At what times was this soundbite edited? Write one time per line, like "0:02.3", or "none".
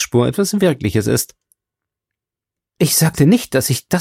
0:02.7